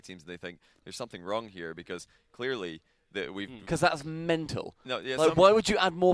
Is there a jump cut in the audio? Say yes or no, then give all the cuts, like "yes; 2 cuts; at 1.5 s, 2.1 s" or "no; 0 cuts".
yes; 1 cut; at 3.6 s